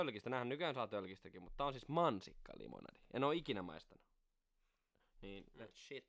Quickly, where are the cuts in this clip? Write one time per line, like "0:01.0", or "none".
none